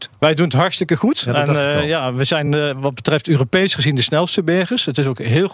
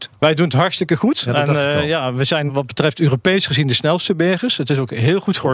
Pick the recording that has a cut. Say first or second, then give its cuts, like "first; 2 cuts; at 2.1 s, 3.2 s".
second; 1 cut; at 2.5 s